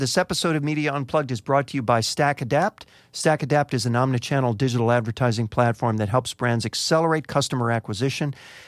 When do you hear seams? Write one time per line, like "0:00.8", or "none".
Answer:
none